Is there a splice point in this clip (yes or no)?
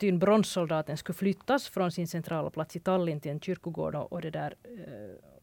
yes